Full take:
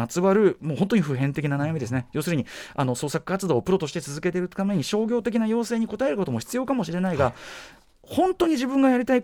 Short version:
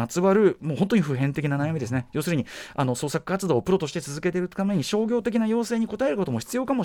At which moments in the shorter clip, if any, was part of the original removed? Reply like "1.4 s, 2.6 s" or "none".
none